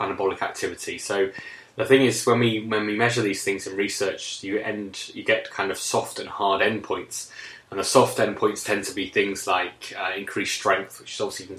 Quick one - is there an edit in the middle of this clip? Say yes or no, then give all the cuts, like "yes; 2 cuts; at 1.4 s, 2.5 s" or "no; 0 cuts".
no; 0 cuts